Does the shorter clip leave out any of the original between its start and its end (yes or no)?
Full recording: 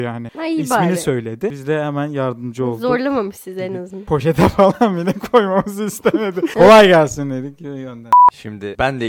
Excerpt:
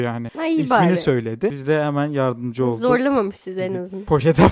no